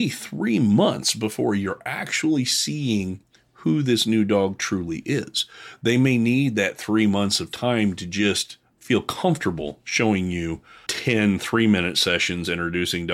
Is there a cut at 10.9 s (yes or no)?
yes